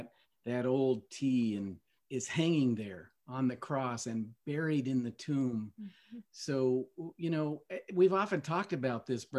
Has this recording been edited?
yes; 1 cut; at 2.0 s

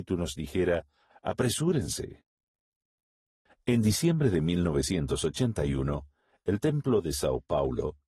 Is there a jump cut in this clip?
yes; 1 cut; at 1.1 s

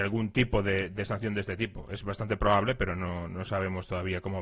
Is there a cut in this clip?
no; 0 cuts

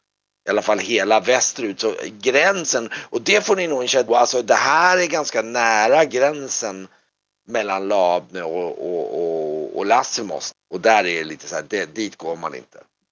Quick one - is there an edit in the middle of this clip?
yes; 2 cuts; at 4.1 s, 10.5 s

